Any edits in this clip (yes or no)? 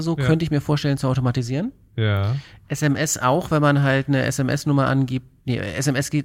no